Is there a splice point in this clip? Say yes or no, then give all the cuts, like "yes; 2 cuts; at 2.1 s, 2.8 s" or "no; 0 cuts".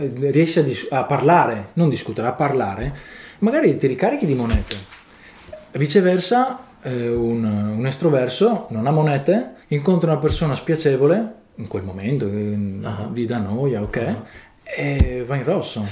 yes; 1 cut; at 9.6 s